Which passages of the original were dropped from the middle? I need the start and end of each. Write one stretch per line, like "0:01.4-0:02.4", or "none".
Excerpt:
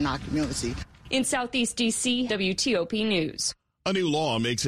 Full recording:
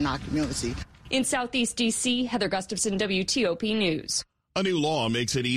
0:02.3-0:03.0